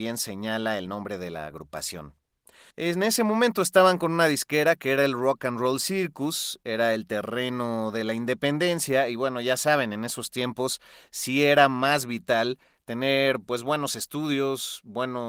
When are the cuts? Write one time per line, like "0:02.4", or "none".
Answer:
0:02.7